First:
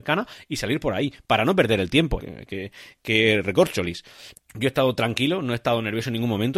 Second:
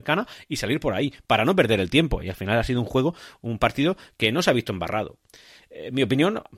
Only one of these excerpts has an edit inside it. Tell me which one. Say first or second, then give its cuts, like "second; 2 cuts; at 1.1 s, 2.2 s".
first; 2 cuts; at 2.2 s, 4.3 s